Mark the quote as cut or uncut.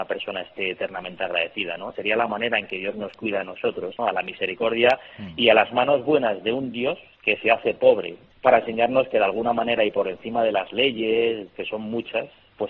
cut